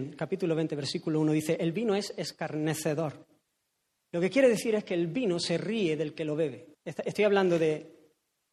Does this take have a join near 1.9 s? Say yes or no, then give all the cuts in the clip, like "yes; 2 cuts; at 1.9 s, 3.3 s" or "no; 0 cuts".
no; 2 cuts; at 4.0 s, 6.7 s